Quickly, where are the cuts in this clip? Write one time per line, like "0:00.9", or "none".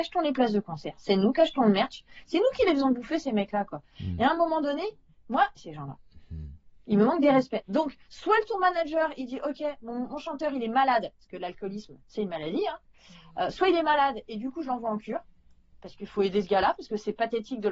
0:05.6